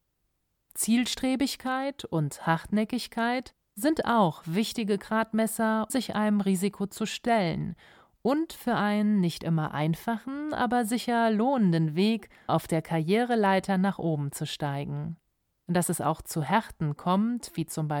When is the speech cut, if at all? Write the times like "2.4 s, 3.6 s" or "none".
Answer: 5.9 s, 12.5 s

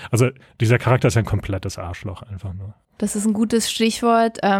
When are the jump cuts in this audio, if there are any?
2.8 s

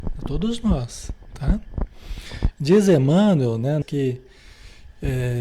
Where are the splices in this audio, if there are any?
2.5 s, 3.8 s

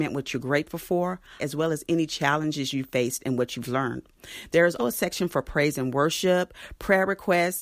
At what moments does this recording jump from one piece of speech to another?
1.4 s, 4.8 s

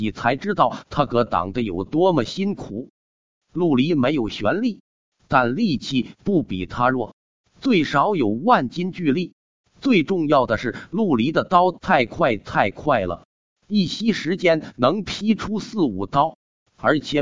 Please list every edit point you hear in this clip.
none

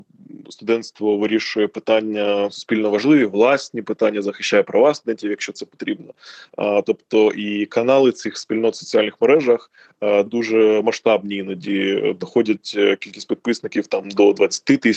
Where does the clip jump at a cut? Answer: 10.3 s

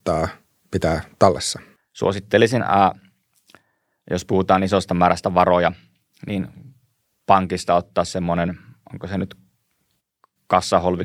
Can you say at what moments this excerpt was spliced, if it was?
1.8 s

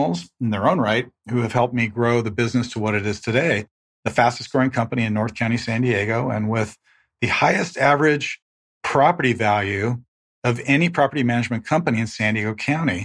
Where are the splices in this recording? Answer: none

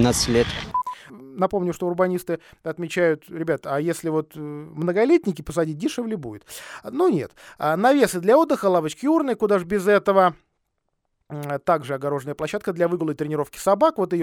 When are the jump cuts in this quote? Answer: 1.1 s

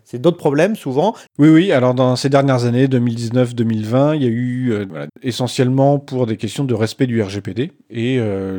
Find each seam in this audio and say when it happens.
1.3 s, 5.1 s

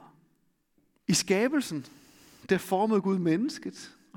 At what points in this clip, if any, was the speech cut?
1.0 s

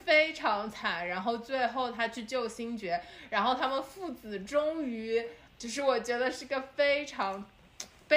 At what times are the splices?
5.5 s

